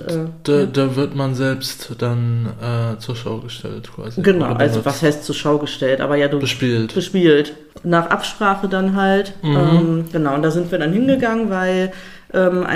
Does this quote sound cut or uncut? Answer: uncut